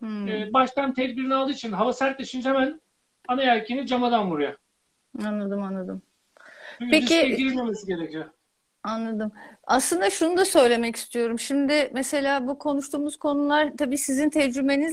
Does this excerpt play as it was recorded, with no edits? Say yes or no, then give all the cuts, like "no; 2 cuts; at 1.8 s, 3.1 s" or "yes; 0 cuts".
yes; 0 cuts